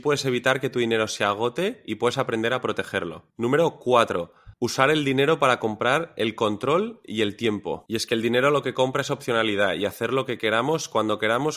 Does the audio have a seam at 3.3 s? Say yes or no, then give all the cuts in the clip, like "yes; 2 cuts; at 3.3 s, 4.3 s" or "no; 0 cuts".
no; 2 cuts; at 4.5 s, 7.9 s